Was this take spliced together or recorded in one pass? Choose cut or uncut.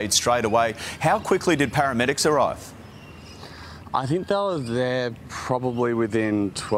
uncut